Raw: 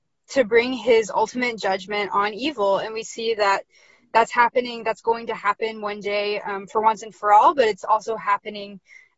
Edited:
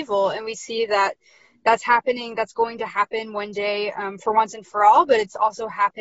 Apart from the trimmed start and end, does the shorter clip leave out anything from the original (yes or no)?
no